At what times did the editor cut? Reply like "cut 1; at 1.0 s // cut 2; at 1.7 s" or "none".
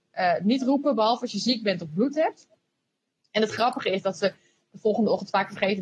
none